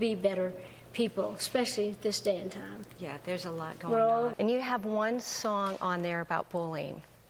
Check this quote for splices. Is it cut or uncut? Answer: cut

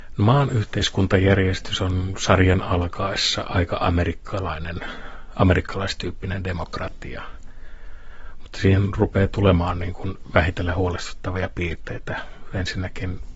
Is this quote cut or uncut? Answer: uncut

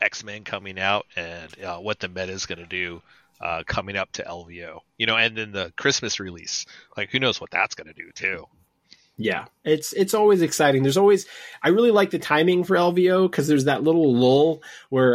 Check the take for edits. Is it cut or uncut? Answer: uncut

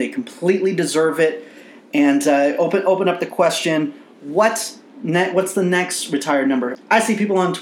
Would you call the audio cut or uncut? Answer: uncut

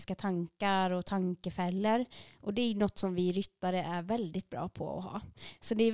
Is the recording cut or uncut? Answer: uncut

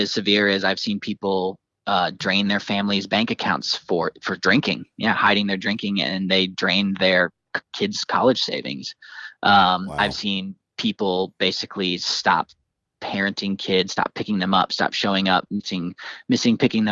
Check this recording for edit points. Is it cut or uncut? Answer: uncut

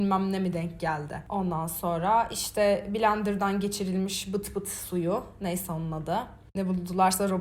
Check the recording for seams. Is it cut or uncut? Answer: cut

